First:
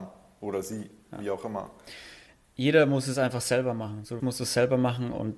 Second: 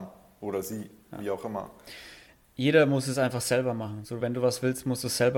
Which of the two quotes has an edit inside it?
first; 1 cut; at 4.2 s

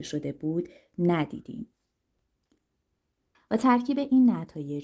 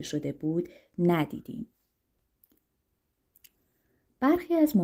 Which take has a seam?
first; 1 cut; at 3.3 s

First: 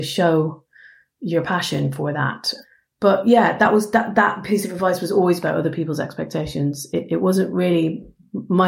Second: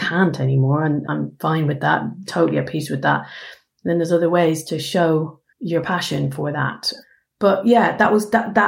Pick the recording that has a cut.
second; 2 cuts; at 1.0 s, 5.5 s

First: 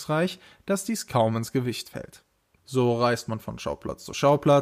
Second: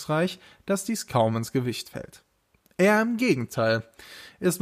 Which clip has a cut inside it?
first; 1 cut; at 2.6 s

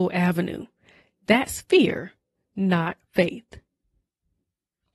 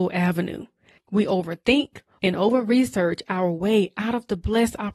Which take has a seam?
second; 2 cuts; at 1.0 s, 2.2 s

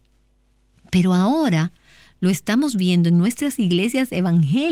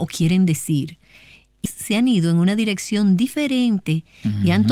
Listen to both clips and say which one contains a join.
second; 1 cut; at 1.7 s

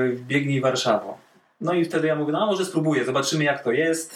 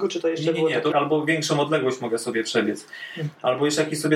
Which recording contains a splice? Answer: second; 1 cut; at 0.9 s

